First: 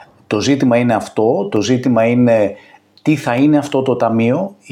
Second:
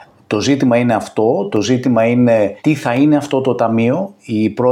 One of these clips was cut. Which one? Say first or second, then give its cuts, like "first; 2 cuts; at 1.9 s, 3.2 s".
second; 1 cut; at 2.6 s